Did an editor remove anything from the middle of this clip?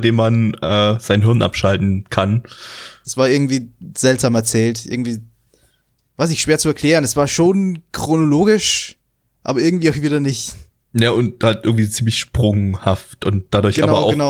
yes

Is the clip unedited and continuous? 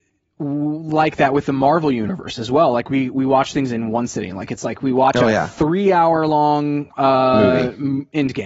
yes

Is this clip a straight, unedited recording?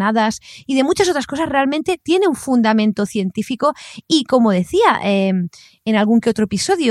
yes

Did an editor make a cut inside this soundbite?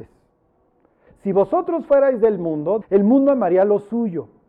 yes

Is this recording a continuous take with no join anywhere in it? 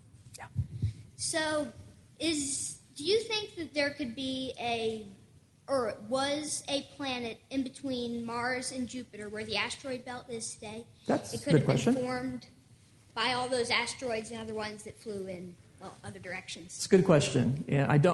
yes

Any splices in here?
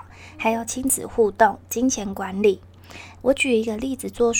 yes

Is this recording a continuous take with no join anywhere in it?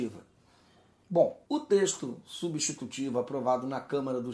no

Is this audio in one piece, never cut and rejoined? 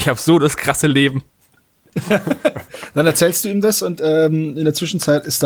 yes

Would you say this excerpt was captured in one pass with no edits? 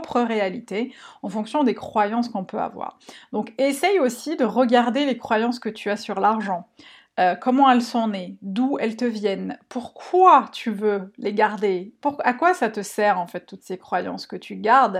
yes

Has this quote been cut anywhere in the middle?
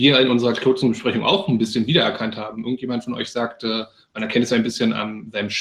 no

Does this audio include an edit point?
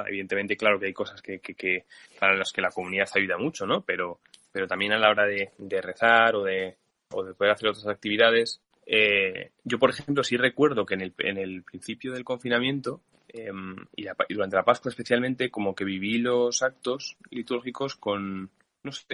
no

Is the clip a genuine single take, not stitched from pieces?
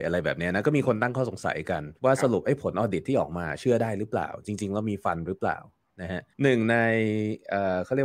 no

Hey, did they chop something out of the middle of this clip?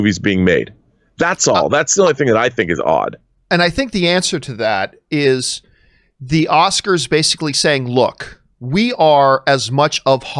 no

